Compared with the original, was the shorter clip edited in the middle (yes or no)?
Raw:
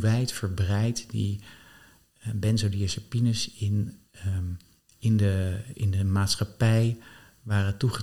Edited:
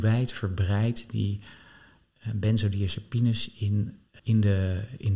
yes